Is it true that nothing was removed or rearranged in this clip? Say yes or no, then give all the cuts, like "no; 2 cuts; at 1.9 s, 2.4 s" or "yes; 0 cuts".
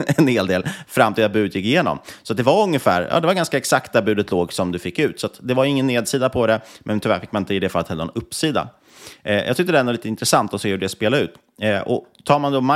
yes; 0 cuts